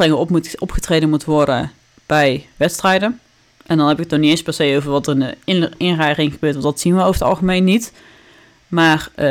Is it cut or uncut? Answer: uncut